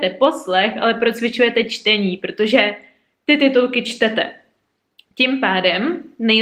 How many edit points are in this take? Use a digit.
0